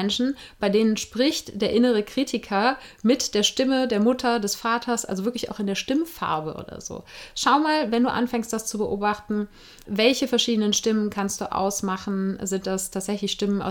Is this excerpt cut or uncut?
uncut